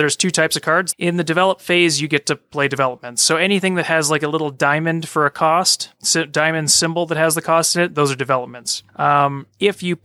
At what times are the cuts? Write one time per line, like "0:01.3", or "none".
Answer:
0:00.9